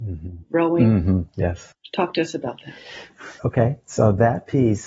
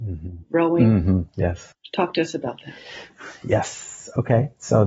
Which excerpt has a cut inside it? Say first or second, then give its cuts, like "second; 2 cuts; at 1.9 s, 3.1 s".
first; 1 cut; at 3.4 s